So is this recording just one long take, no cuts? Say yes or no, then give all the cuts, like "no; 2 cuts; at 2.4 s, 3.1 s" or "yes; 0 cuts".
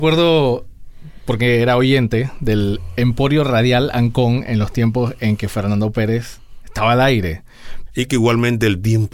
no; 1 cut; at 7.9 s